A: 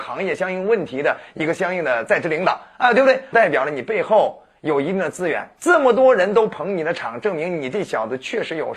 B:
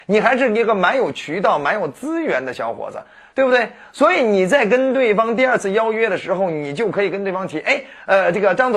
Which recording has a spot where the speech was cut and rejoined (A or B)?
A